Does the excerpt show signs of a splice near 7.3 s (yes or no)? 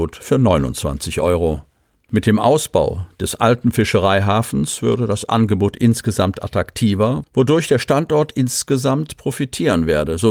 no